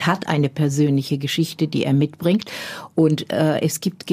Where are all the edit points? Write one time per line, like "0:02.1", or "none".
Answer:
none